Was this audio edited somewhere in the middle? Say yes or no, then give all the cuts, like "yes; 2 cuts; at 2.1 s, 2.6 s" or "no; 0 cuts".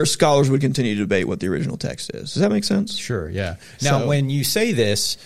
no; 0 cuts